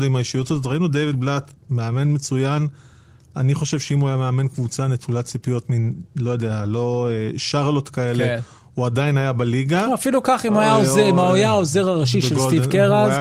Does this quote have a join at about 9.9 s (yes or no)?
no